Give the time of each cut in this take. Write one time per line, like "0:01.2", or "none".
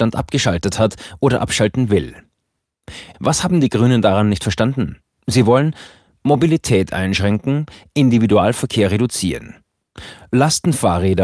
0:03.1